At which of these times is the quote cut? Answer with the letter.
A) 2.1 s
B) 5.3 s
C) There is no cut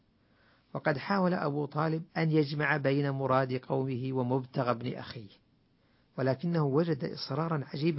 A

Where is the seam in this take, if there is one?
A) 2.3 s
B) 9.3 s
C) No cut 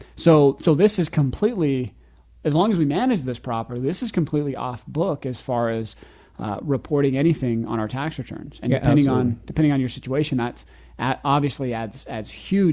C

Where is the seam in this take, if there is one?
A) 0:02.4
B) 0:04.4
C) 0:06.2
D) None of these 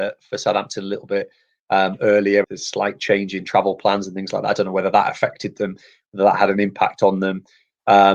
A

